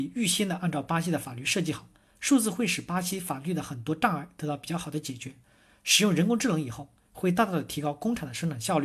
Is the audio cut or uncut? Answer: uncut